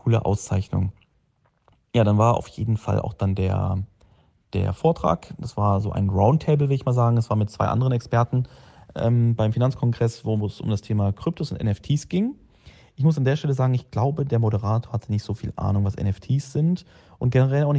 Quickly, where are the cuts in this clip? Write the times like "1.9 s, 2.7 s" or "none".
none

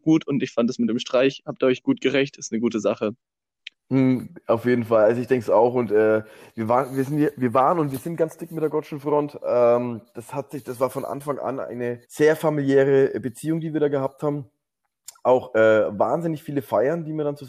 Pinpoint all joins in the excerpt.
12.0 s

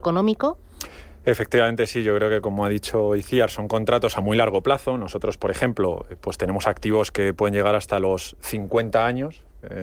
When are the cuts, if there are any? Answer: none

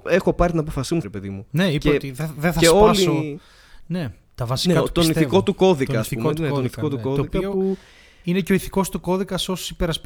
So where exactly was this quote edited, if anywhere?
1.0 s

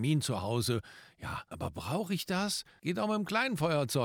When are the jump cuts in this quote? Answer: 1.5 s, 2.8 s

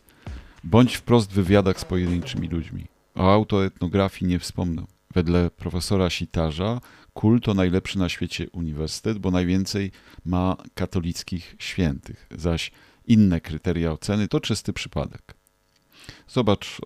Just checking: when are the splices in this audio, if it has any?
5.0 s, 14.3 s

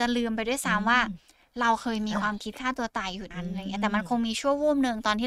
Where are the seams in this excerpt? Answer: 3.3 s

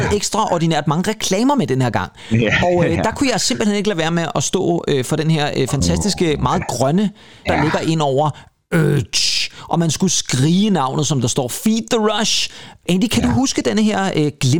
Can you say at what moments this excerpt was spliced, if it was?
7.4 s, 12.8 s

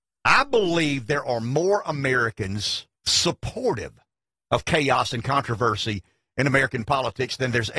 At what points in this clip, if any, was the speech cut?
3.0 s

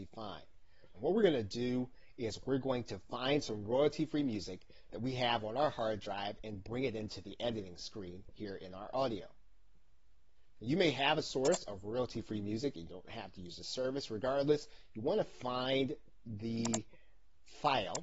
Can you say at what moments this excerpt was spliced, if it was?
0.9 s

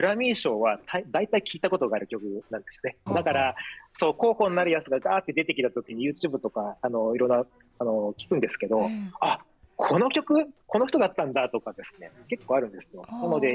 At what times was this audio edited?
3.1 s

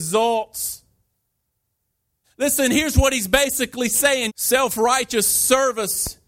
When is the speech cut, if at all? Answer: 2.2 s, 4.3 s

